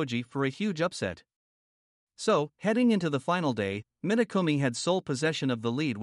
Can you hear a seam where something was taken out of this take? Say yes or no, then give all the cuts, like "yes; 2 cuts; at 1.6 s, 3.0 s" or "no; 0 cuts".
no; 0 cuts